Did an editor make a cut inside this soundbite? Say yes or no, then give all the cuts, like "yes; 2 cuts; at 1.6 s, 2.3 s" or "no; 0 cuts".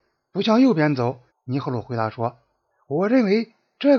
yes; 1 cut; at 1.3 s